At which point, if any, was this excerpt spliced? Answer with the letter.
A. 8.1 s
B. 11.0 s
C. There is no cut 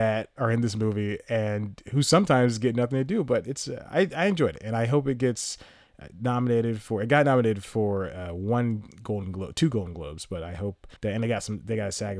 B